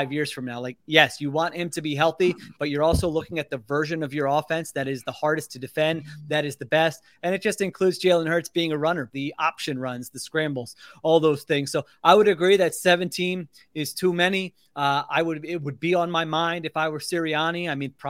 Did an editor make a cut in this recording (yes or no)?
yes